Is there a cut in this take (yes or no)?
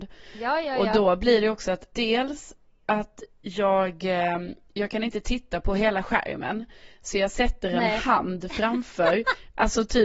no